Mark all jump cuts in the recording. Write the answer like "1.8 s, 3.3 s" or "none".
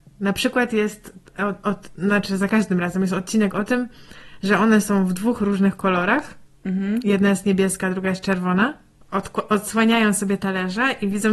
9.0 s